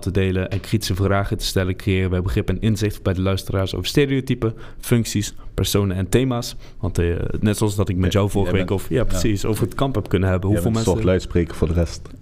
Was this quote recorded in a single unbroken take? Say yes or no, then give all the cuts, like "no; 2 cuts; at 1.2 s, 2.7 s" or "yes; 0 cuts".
no; 1 cut; at 6.7 s